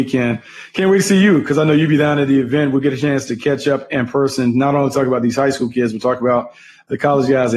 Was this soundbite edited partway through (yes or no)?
no